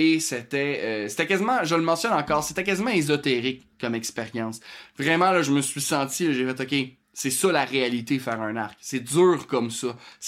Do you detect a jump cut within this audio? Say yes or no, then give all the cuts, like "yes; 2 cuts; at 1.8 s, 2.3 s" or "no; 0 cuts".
no; 0 cuts